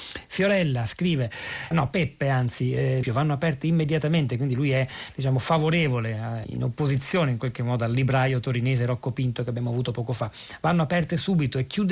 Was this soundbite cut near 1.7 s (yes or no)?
yes